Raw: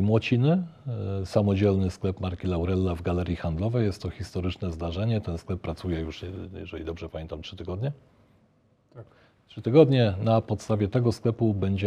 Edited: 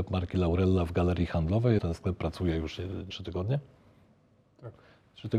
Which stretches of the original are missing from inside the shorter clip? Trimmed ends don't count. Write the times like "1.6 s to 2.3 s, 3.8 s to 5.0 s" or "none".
3.9 s to 5.2 s, 6.5 s to 7.4 s